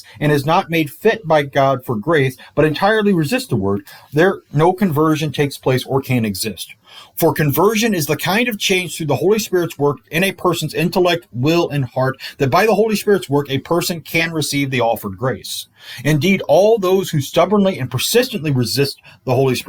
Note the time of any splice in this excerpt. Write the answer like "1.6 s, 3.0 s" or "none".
none